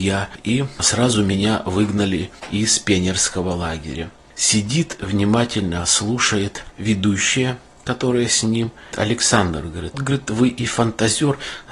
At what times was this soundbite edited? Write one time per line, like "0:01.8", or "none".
0:08.9
0:09.9